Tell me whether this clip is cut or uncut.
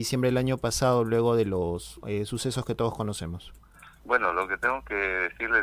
uncut